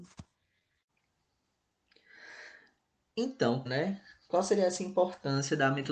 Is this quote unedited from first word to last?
no; 1 cut; at 3.7 s

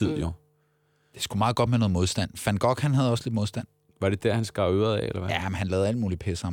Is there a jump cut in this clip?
no; 0 cuts

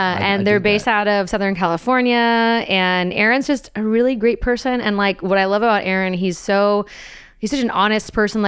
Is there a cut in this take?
no; 0 cuts

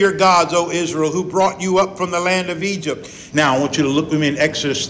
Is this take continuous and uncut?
no; 1 cut; at 3.3 s

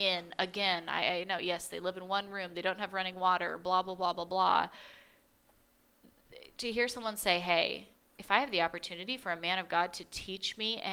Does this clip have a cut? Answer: no; 0 cuts

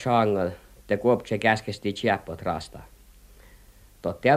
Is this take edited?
no; 0 cuts

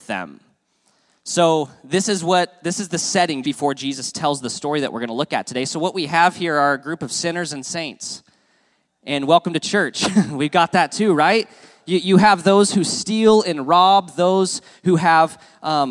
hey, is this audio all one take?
no; 1 cut; at 3.4 s

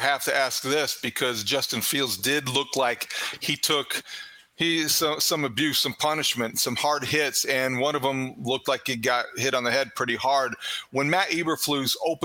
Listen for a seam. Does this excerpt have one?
no; 0 cuts

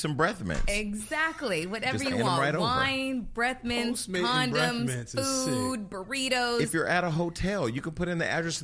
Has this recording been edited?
no; 0 cuts

